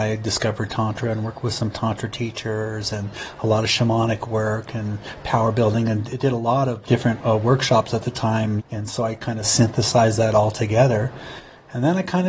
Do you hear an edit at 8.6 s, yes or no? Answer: yes